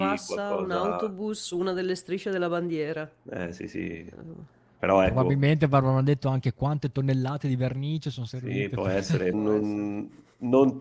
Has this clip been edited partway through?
yes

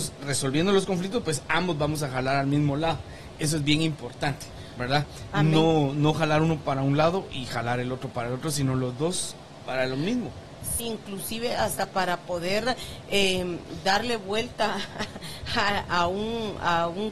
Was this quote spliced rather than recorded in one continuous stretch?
yes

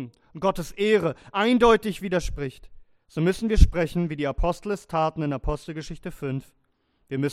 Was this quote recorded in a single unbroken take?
yes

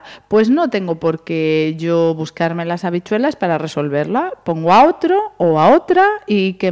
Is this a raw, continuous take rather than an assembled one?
yes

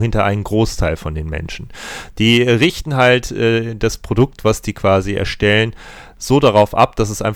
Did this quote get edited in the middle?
no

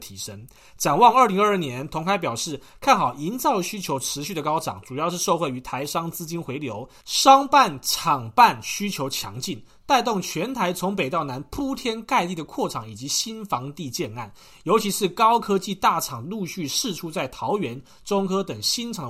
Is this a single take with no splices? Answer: yes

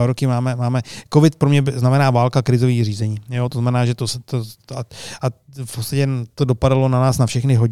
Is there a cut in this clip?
no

